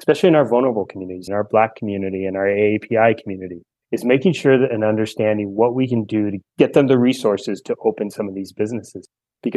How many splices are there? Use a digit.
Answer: 1